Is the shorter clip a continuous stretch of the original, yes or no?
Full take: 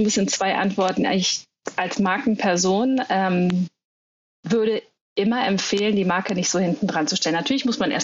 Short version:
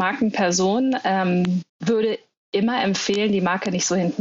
no